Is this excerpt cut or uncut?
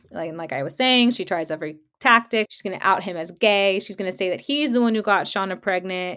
cut